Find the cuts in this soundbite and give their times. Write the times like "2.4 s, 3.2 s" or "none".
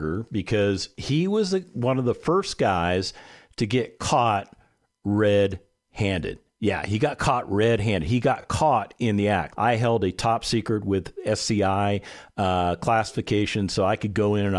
9.5 s